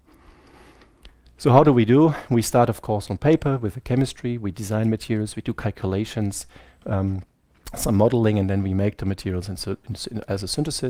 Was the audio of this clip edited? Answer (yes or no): no